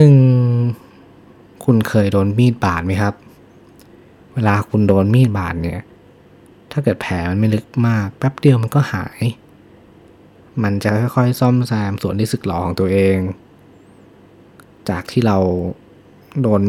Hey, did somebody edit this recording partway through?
no; 0 cuts

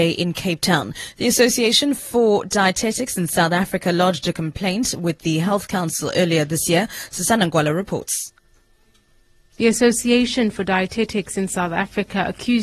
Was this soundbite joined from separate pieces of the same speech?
no; 0 cuts

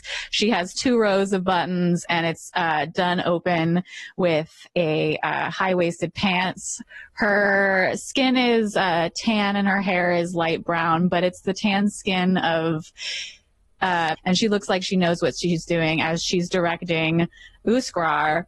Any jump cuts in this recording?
yes; 1 cut; at 14.1 s

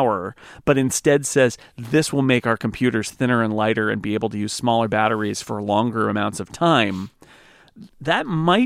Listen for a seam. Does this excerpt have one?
no; 0 cuts

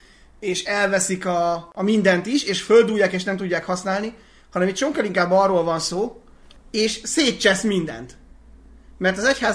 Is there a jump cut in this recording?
yes; 2 cuts; at 1.7 s, 6.6 s

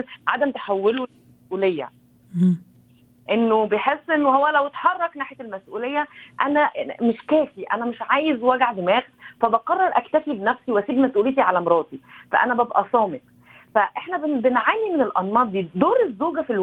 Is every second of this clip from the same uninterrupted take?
yes; 0 cuts

